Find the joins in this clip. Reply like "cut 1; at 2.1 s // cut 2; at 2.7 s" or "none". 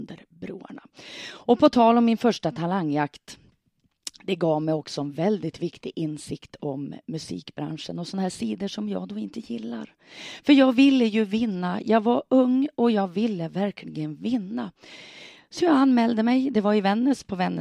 none